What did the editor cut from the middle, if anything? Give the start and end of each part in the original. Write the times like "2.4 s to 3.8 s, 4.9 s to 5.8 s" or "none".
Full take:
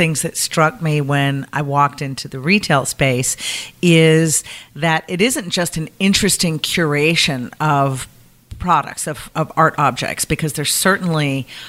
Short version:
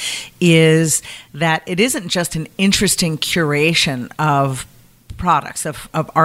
none